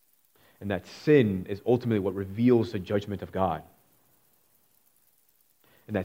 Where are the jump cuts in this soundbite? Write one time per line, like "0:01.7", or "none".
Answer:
none